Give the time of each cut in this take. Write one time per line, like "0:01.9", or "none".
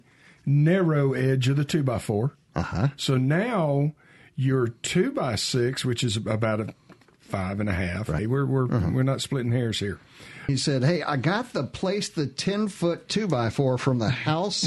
0:08.2
0:10.5